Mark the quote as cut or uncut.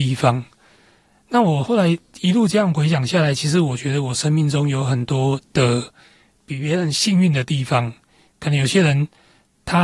uncut